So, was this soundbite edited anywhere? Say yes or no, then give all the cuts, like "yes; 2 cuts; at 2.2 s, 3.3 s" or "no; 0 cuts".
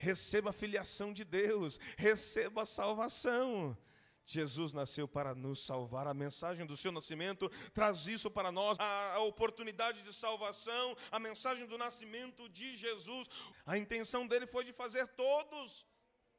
yes; 2 cuts; at 8.8 s, 13.5 s